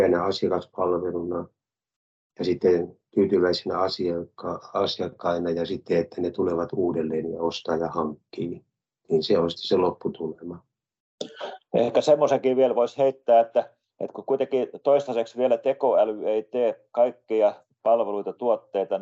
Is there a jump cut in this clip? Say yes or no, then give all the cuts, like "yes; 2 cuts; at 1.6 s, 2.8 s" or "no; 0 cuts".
no; 0 cuts